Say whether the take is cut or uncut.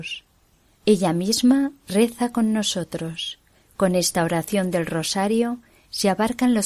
uncut